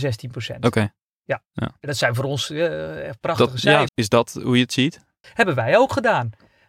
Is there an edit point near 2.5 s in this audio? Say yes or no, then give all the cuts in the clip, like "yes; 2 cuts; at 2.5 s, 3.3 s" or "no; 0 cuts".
no; 2 cuts; at 3.9 s, 5.2 s